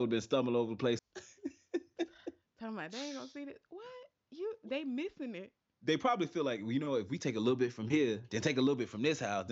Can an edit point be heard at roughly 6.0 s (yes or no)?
no